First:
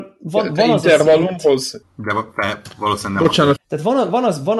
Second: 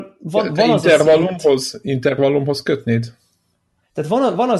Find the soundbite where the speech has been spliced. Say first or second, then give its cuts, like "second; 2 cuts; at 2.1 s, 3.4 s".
first; 2 cuts; at 1.8 s, 3.6 s